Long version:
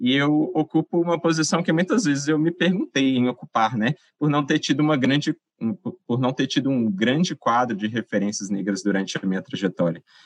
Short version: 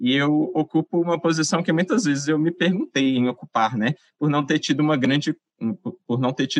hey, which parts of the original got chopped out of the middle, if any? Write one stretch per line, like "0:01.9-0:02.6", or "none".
none